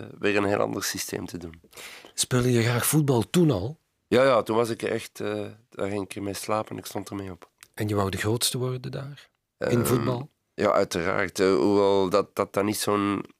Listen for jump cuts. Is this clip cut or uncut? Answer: uncut